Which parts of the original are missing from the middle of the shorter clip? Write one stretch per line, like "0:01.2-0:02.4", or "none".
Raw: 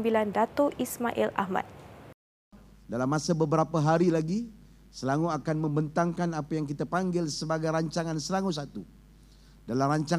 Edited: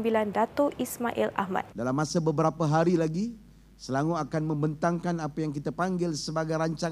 0:01.7-0:02.8